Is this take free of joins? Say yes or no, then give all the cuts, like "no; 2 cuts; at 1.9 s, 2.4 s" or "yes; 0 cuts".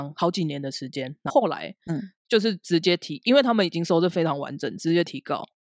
no; 1 cut; at 1.3 s